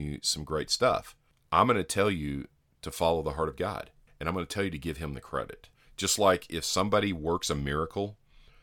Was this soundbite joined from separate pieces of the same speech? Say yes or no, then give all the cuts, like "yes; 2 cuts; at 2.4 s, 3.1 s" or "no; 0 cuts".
no; 0 cuts